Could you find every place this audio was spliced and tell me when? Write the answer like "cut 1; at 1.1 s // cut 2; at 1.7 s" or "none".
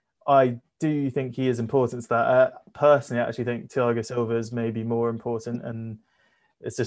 none